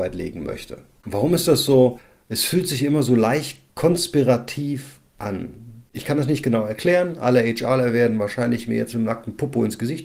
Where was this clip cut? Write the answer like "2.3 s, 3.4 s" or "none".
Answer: none